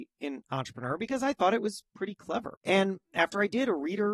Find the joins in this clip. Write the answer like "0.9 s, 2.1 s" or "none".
2.5 s